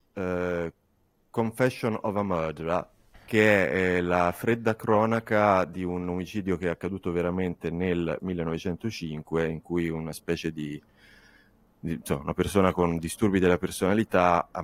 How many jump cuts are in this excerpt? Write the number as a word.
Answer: one